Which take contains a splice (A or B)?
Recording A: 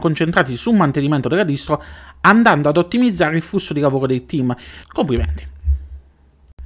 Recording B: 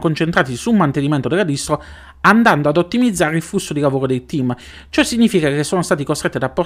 A